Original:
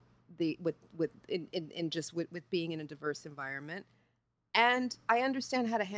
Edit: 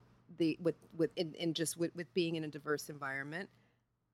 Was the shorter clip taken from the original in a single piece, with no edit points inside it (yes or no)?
no